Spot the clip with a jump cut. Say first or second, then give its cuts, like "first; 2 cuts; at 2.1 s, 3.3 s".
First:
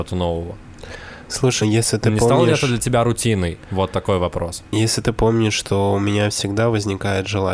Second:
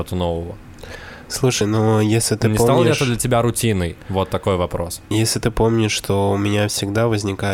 first; 1 cut; at 1.6 s